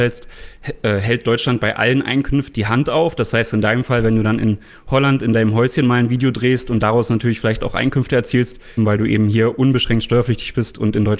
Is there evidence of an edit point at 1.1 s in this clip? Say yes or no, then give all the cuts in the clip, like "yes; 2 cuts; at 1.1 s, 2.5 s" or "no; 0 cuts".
no; 2 cuts; at 2.5 s, 8.8 s